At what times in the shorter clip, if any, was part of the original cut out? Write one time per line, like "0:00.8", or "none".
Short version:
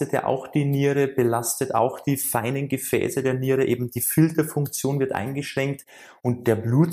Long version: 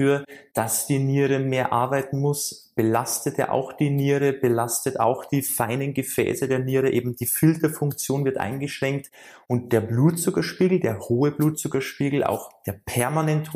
none